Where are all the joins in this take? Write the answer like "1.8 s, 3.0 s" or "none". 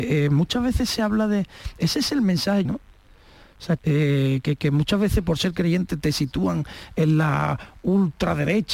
2.6 s, 3.8 s